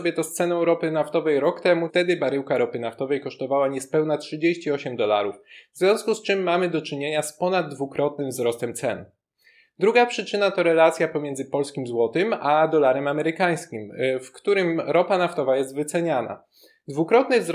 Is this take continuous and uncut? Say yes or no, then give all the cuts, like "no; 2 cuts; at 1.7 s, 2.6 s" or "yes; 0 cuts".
no; 1 cut; at 1.9 s